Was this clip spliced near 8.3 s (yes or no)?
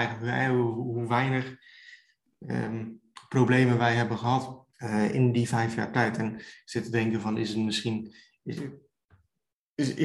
no